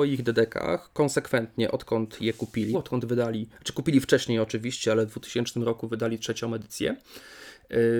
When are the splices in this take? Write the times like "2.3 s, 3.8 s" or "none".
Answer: 2.7 s